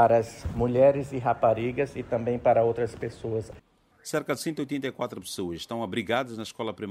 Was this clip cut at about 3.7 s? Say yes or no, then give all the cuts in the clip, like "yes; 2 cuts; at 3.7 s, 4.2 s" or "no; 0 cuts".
no; 0 cuts